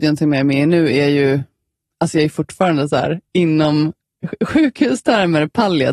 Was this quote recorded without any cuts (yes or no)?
yes